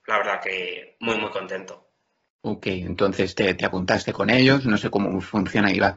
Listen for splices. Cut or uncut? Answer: uncut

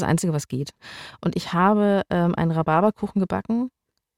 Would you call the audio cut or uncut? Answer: uncut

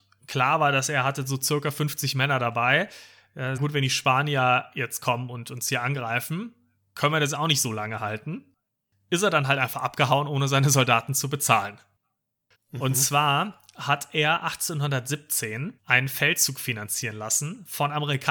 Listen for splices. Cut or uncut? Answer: cut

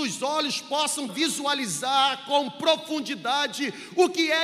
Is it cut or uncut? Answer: cut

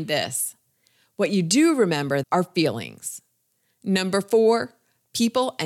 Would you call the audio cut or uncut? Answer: cut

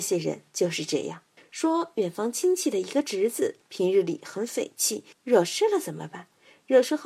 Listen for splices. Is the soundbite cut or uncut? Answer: cut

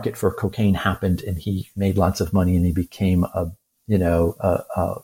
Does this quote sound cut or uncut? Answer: uncut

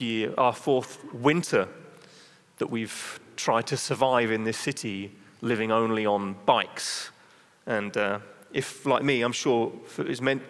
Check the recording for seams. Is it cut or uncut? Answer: uncut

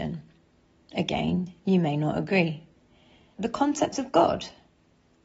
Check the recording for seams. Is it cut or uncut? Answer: cut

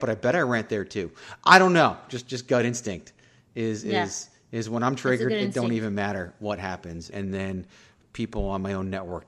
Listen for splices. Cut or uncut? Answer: cut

